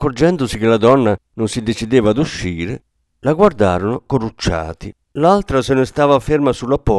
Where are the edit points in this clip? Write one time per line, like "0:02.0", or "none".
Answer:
0:05.1